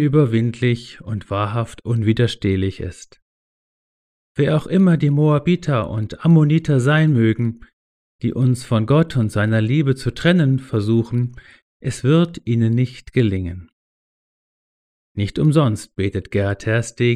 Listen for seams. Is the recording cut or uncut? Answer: uncut